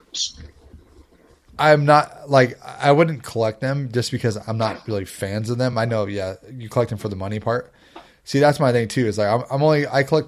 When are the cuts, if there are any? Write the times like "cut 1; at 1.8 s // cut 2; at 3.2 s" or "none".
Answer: none

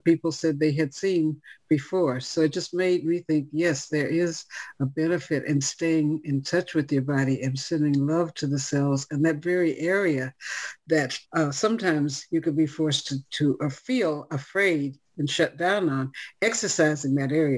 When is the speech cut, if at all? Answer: cut 1; at 11.2 s

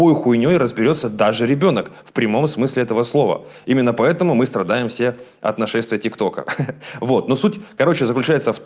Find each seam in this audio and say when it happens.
none

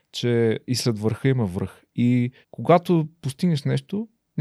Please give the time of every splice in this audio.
cut 1; at 2.4 s

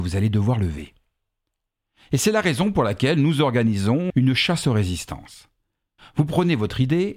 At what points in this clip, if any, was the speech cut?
cut 1; at 4.1 s // cut 2; at 6.0 s

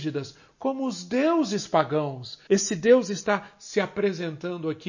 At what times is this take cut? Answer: cut 1; at 2.5 s

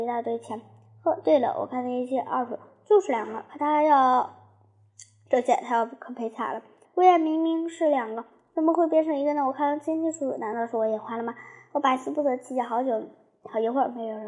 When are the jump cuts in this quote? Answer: cut 1; at 6.8 s

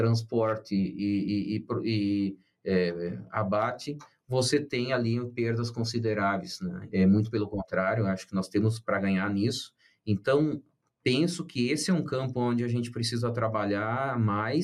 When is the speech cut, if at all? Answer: cut 1; at 6.9 s

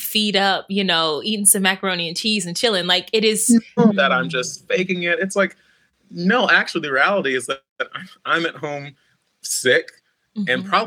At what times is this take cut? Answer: cut 1; at 3.9 s

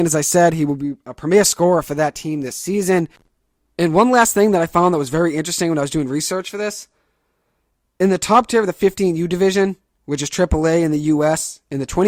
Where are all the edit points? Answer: none

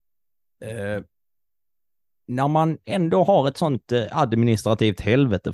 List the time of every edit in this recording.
none

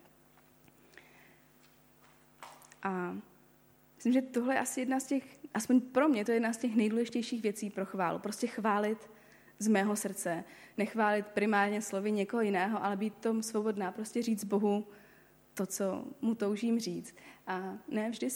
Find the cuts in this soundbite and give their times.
none

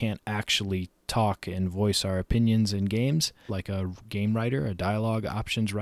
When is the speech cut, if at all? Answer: cut 1; at 3.5 s

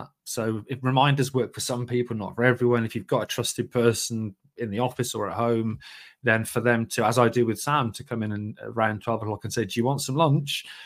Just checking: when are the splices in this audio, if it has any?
none

